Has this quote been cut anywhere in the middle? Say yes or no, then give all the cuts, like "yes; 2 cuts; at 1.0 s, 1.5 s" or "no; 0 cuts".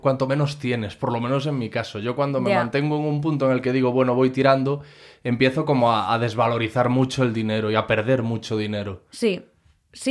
no; 0 cuts